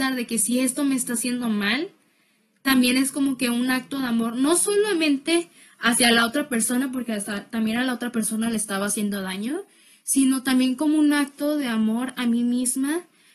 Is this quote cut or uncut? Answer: uncut